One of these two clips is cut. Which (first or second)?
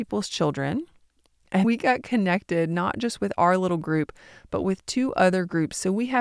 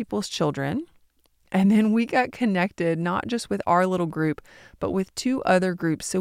first